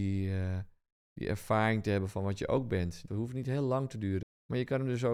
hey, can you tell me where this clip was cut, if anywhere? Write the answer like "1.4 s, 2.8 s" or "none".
3.1 s, 4.2 s